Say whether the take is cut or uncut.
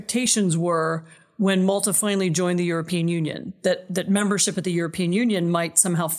uncut